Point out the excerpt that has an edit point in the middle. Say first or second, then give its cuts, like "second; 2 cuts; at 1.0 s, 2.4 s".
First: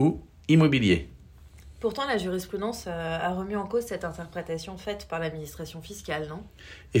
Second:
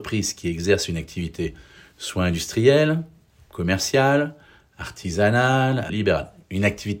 second; 1 cut; at 5.9 s